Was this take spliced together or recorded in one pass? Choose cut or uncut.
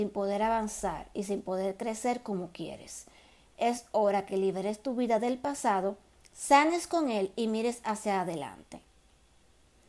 uncut